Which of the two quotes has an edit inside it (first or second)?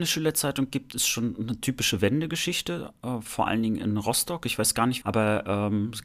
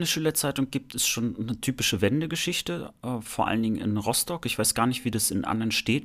first